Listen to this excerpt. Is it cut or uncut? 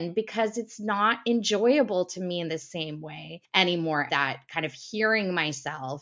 cut